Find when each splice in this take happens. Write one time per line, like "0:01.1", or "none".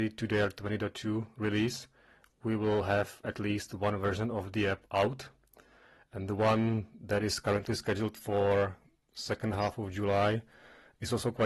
none